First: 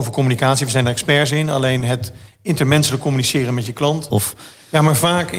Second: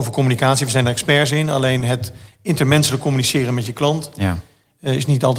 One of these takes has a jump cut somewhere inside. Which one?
first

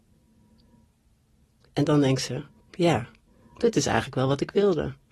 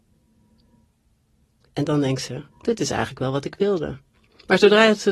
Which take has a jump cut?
second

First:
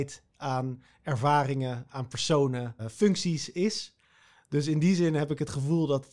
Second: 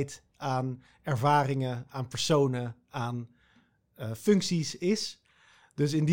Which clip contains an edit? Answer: first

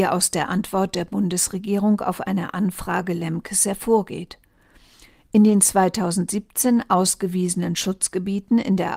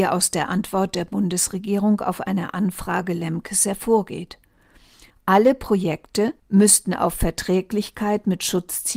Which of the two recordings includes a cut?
second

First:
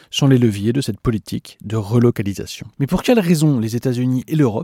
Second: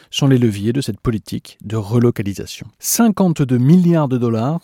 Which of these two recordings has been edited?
first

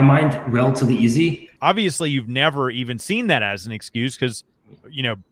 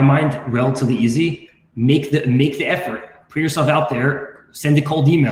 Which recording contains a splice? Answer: first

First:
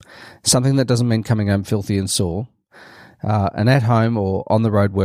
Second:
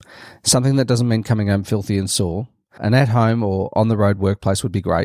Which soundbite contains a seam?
second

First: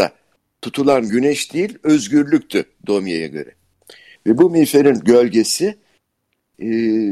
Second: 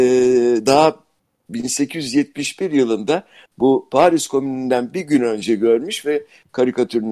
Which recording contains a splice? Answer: first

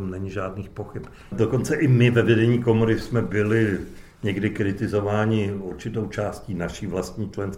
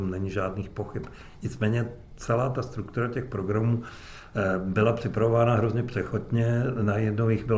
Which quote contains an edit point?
first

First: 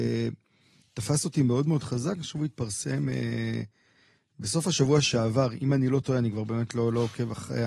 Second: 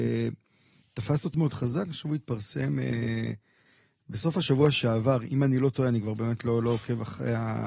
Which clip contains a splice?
second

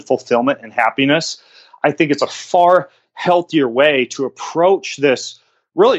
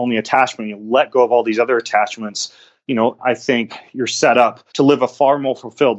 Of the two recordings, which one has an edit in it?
second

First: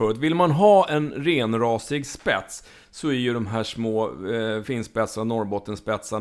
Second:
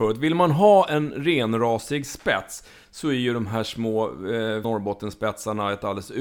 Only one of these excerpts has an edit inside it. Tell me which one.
second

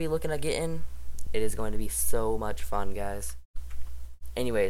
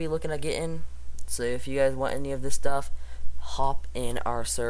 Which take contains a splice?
first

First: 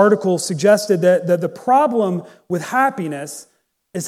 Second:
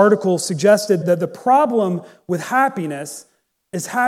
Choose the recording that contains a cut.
second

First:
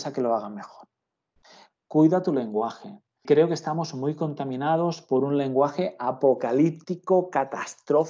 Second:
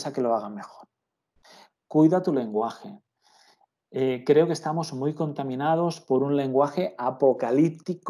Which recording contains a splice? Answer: first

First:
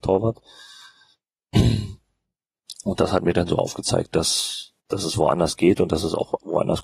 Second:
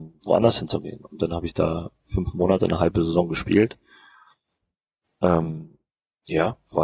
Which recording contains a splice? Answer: first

